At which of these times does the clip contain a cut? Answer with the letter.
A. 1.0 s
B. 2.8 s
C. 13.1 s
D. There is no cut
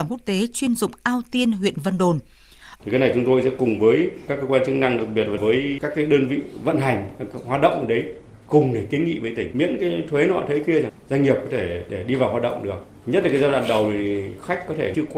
B